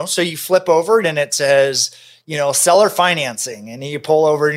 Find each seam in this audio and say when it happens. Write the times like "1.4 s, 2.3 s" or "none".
1.0 s